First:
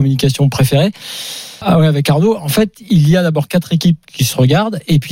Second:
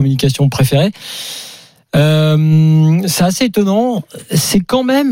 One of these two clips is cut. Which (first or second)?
first